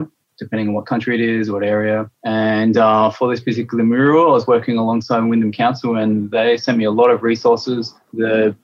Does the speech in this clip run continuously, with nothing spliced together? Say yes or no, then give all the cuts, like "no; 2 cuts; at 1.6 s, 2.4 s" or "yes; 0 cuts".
no; 1 cut; at 2.2 s